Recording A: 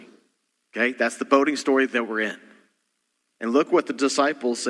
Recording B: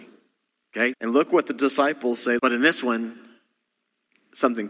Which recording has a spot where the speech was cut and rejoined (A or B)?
B